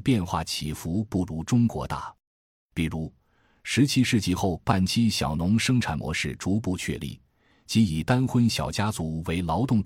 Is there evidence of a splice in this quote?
no; 0 cuts

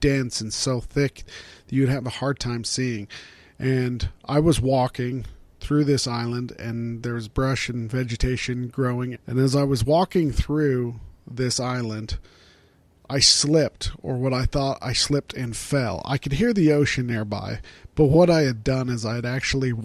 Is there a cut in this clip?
yes; 1 cut; at 9.1 s

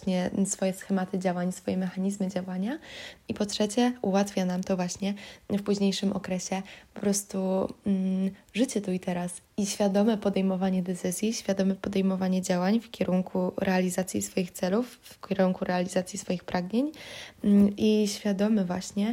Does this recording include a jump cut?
yes; 1 cut; at 9.5 s

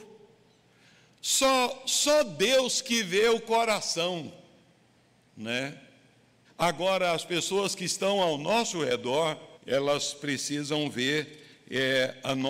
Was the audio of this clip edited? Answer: yes; 2 cuts; at 6.4 s, 9.5 s

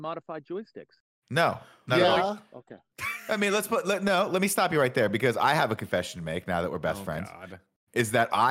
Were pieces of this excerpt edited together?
no; 0 cuts

